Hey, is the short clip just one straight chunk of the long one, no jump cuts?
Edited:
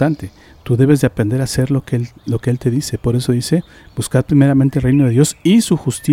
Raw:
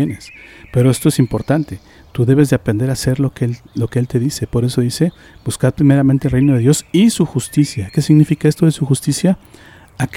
yes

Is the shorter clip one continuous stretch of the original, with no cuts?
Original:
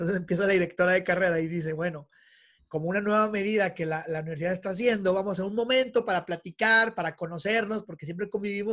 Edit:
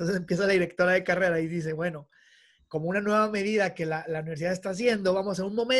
yes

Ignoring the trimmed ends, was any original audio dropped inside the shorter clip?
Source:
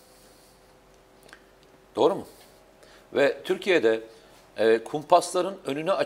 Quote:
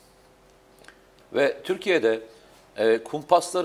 yes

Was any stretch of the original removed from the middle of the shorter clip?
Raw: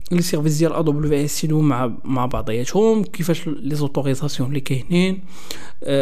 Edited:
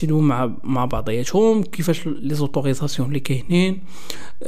no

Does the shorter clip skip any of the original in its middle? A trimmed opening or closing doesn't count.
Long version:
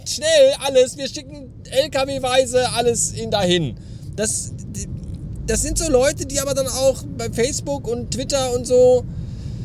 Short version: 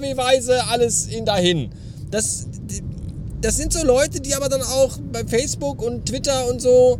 no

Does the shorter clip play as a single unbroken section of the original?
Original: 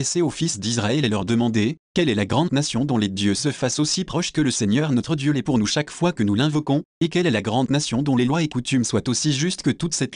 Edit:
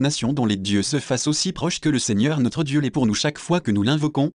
yes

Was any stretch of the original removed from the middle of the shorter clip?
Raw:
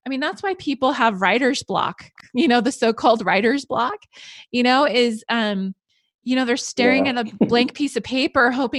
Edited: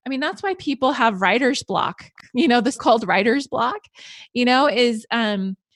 yes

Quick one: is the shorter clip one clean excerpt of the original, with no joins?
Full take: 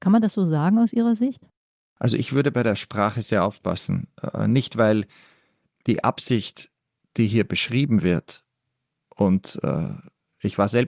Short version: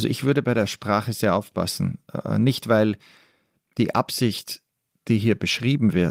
yes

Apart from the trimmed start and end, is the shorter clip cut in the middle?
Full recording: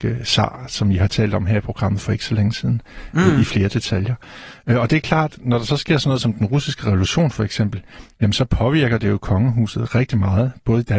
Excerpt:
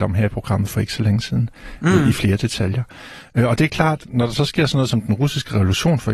no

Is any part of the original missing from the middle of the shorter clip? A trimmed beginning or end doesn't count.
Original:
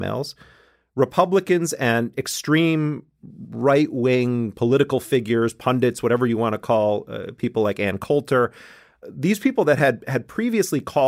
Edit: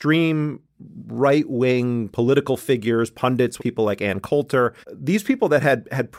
yes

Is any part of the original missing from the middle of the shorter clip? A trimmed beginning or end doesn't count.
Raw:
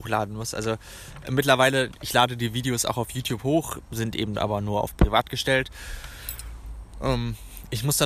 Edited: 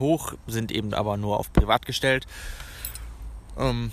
no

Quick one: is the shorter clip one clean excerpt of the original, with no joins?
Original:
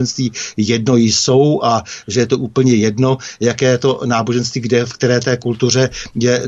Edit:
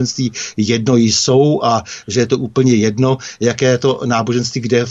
yes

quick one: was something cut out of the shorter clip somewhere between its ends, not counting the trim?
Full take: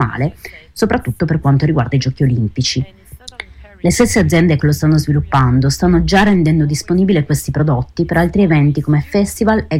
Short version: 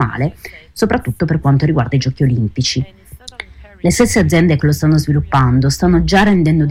no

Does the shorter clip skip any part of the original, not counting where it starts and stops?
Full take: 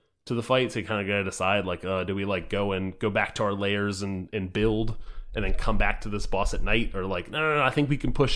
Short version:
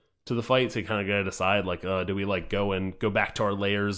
no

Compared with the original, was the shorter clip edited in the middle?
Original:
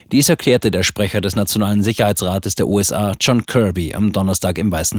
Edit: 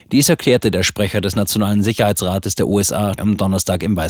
yes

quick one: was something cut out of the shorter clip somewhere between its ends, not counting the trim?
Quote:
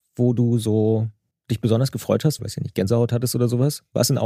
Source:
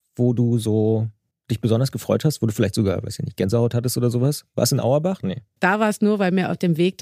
yes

